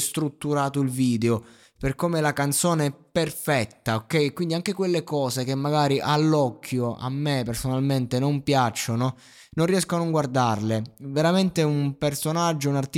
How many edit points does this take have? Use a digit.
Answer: 0